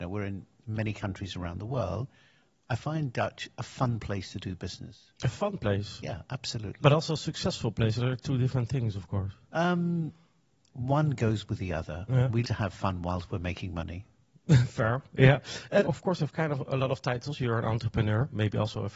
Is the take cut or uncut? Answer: cut